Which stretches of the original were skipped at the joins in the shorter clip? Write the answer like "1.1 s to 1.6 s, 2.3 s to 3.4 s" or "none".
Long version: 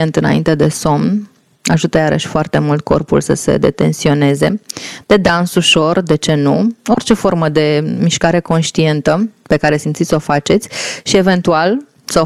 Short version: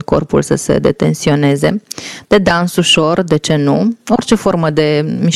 none